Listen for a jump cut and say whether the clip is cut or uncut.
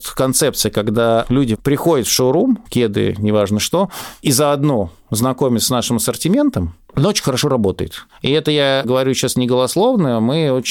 cut